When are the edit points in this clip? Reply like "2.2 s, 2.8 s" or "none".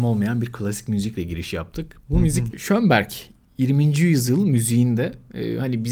2.5 s